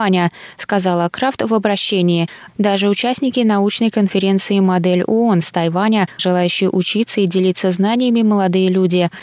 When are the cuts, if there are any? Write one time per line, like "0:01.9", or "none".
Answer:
0:02.5
0:06.2